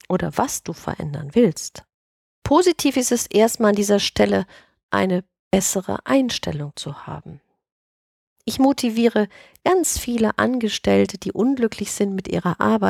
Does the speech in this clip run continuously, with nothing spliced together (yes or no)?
yes